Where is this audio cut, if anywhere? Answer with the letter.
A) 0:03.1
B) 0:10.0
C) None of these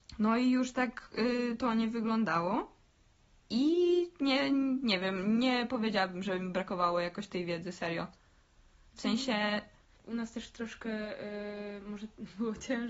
B